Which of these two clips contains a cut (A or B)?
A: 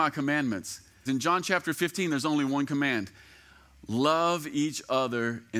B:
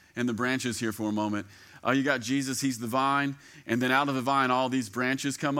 A